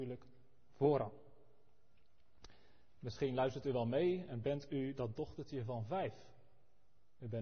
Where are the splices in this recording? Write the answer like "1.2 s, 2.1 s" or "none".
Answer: none